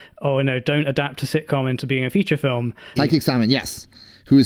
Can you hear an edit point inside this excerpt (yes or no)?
yes